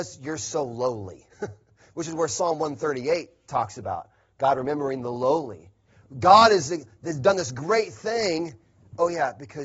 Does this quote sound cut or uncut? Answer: uncut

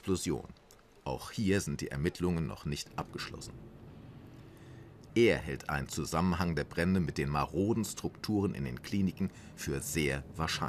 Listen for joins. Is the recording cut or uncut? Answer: cut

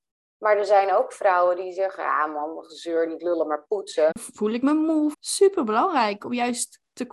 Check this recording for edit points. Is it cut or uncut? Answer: cut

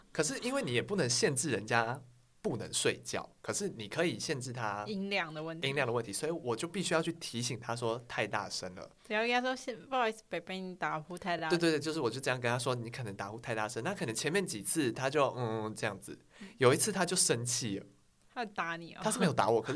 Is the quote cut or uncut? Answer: uncut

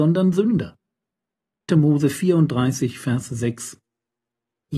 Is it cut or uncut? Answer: cut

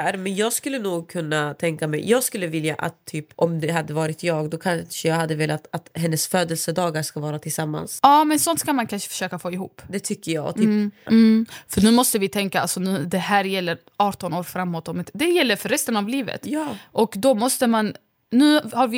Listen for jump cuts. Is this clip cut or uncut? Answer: cut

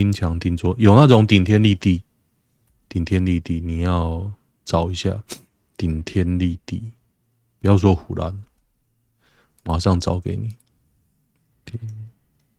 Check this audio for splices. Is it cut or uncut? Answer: uncut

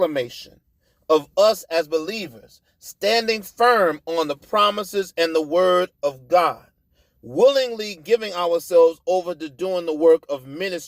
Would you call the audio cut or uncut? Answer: uncut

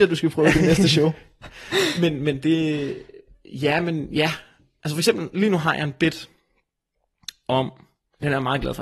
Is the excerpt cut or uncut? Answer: uncut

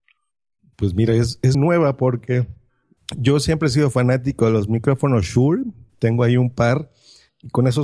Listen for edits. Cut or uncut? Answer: cut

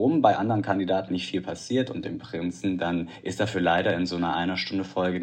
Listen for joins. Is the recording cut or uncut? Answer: cut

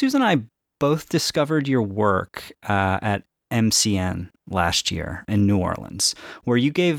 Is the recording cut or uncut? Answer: cut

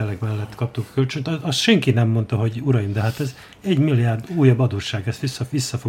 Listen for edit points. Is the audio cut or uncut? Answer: uncut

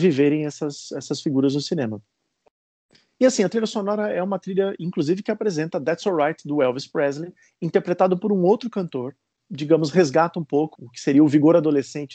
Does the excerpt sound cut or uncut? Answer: cut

